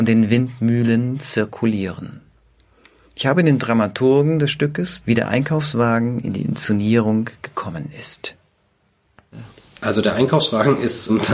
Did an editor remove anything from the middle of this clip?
yes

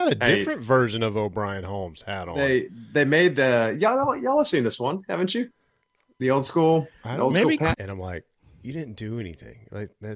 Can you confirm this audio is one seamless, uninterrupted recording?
no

